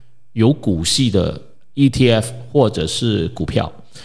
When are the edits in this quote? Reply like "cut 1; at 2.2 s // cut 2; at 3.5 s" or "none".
none